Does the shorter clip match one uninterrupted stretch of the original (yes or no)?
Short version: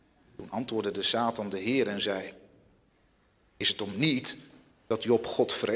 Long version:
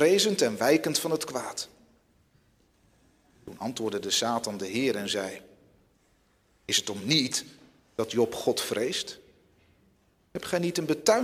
yes